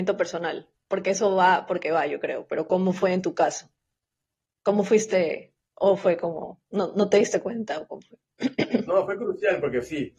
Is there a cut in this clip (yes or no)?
no